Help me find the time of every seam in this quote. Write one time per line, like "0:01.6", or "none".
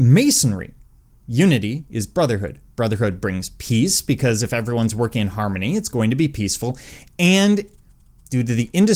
0:01.1